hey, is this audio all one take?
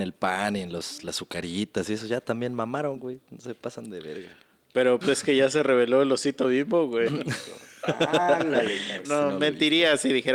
no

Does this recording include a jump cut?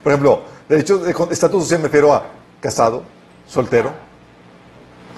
no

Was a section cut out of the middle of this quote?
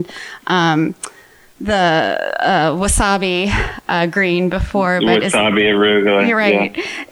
no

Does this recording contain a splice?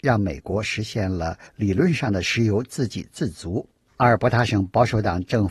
yes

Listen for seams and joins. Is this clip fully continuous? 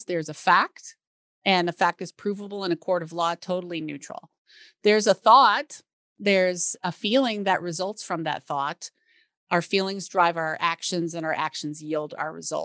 yes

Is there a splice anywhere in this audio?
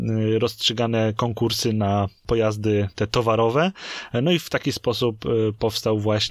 no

